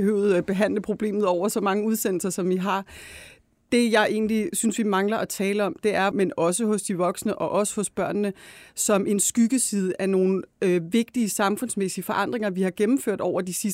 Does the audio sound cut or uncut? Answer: cut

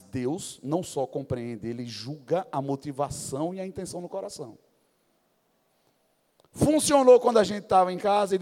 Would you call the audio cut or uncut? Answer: uncut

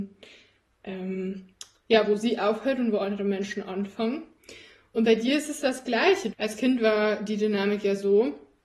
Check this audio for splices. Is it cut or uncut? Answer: cut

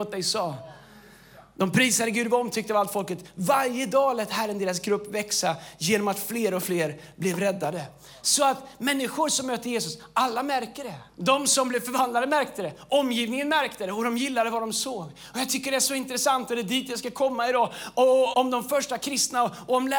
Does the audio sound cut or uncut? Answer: cut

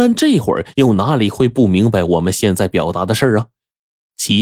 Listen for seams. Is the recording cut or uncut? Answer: uncut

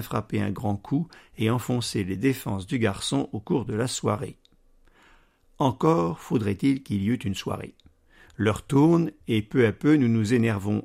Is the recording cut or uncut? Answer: uncut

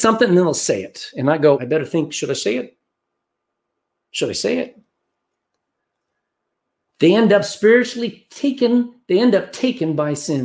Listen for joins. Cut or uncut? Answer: cut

